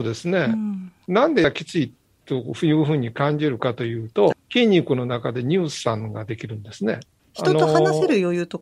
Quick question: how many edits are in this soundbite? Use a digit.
3